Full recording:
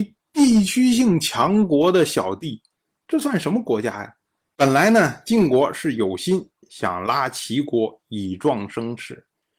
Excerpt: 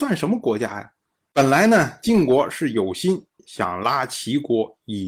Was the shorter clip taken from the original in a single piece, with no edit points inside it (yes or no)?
yes